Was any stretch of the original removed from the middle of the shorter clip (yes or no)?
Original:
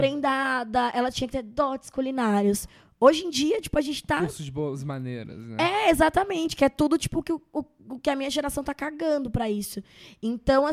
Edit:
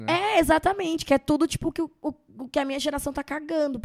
no